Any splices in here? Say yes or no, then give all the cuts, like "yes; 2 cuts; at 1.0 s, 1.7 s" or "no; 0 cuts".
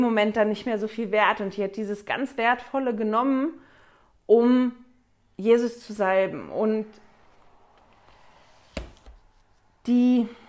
no; 0 cuts